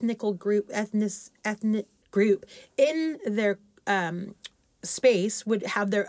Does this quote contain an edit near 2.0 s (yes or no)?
yes